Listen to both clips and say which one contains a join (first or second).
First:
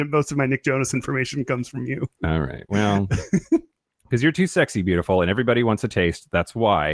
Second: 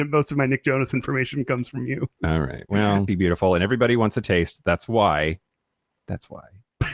second